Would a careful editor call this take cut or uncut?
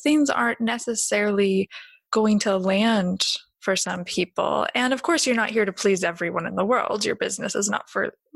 uncut